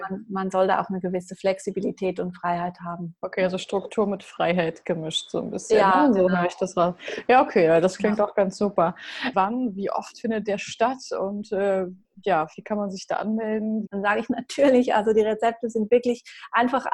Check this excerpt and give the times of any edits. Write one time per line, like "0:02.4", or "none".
0:09.3
0:13.9